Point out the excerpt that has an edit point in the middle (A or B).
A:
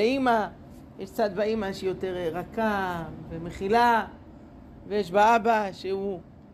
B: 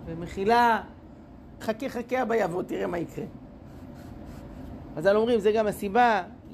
B